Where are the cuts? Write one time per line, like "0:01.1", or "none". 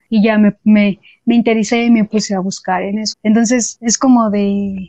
0:03.1